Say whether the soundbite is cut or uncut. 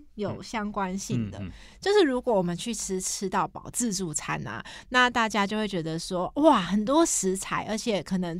uncut